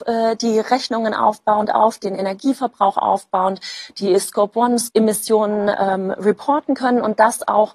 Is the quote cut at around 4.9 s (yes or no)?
yes